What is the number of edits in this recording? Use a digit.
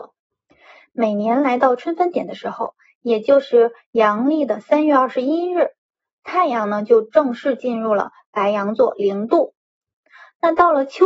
0